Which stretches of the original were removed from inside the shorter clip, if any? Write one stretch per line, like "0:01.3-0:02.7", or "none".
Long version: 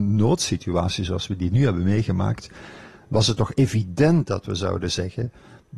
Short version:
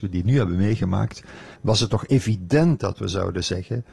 0:02.8-0:03.0